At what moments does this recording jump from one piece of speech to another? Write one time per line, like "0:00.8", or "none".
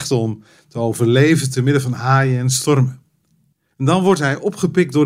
none